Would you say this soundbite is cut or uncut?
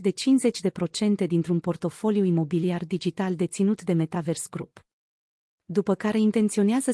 uncut